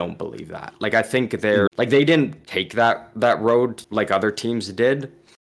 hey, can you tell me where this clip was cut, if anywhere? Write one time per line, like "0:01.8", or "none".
0:01.7
0:03.8